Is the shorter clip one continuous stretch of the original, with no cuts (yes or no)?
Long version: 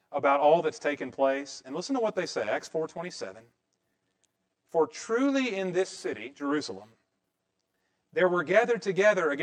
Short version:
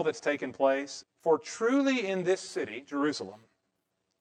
no